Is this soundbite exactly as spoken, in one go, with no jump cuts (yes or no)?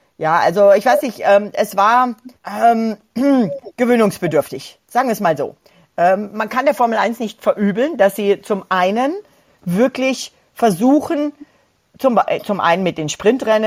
no